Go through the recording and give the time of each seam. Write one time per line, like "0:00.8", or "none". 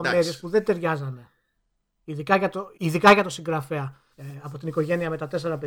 0:02.7
0:04.1